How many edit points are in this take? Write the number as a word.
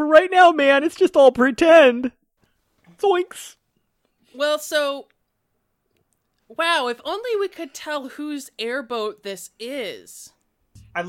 zero